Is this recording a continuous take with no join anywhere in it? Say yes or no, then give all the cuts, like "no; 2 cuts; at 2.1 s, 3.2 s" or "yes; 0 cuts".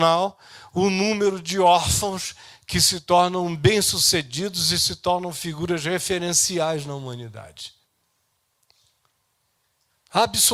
yes; 0 cuts